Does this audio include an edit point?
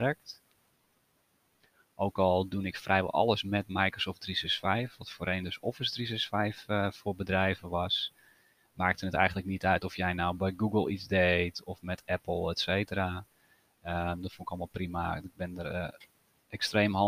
no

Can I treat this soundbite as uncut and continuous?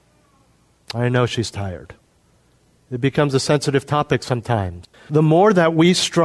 no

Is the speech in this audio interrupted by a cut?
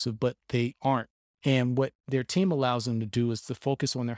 yes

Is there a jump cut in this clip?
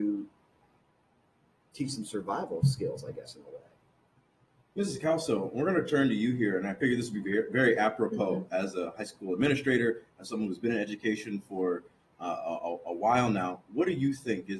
no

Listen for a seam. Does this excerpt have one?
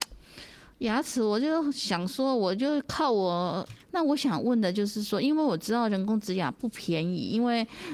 yes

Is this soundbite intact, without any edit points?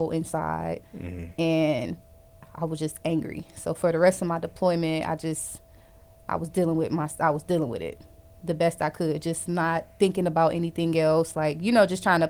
yes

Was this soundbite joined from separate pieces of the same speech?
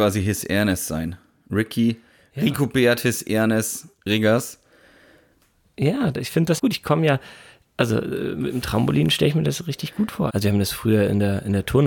yes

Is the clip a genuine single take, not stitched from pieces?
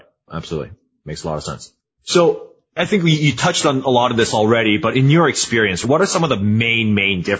yes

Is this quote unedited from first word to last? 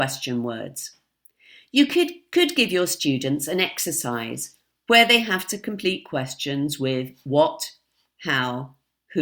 yes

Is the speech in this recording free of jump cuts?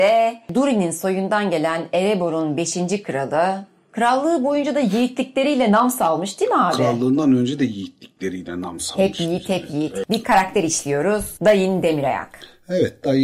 yes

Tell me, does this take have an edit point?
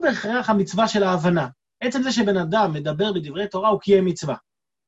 no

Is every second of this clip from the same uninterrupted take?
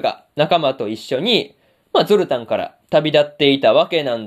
yes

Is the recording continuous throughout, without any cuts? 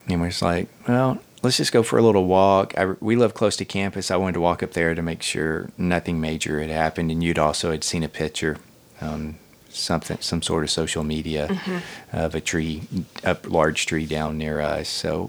yes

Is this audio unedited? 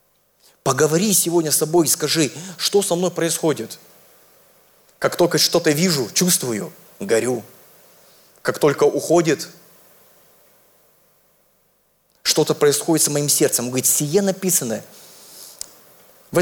yes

